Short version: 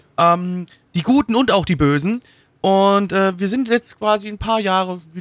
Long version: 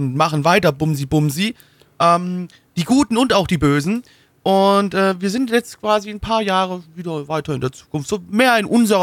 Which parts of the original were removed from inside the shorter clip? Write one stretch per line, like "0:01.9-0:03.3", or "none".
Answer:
none